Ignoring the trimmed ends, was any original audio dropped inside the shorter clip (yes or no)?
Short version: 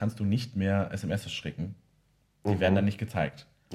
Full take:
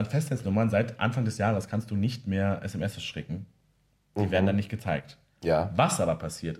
no